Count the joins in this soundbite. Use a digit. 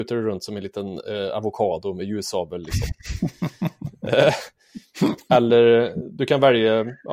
0